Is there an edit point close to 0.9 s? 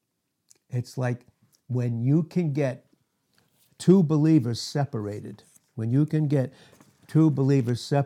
no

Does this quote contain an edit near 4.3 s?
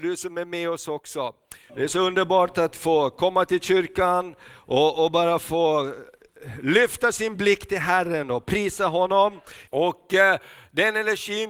no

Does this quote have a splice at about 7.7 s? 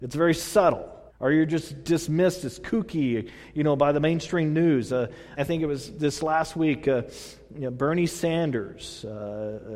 no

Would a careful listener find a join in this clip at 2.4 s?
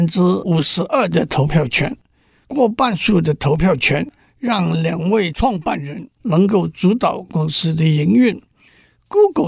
yes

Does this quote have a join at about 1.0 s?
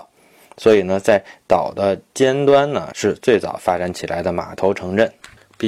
no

